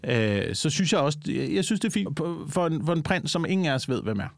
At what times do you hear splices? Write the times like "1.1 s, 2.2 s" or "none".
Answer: 2.1 s